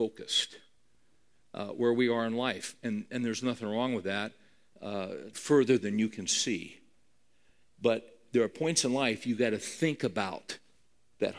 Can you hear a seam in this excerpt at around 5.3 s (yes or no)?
yes